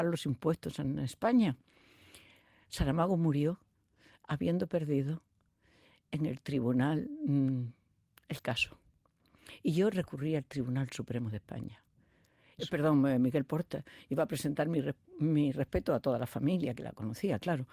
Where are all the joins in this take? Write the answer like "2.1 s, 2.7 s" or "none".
12.6 s